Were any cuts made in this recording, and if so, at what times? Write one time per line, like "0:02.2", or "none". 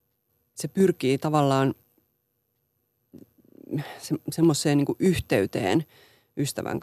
none